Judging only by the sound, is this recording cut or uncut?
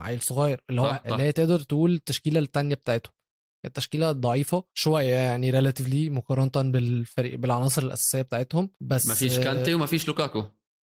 cut